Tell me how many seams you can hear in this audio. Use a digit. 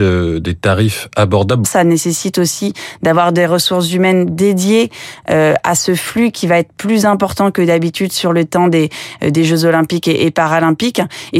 1